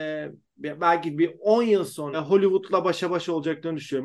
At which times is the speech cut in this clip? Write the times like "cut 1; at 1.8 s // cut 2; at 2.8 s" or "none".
cut 1; at 2.1 s